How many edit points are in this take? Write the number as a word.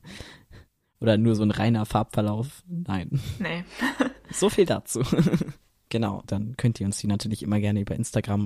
one